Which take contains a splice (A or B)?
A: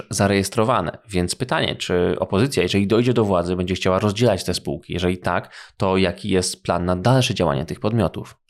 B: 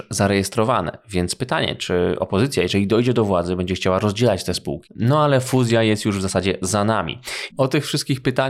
B